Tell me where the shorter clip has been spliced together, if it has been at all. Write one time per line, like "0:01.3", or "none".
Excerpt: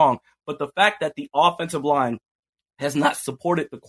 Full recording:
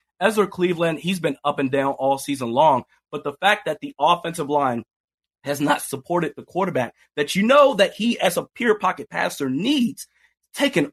none